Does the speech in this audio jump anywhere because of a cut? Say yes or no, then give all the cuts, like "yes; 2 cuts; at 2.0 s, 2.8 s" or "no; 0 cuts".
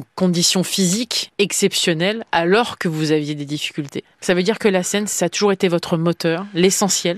yes; 1 cut; at 4.1 s